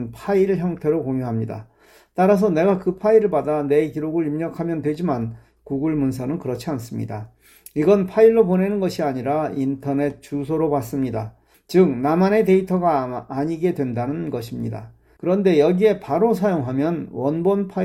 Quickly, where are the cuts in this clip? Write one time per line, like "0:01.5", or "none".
0:11.5
0:15.2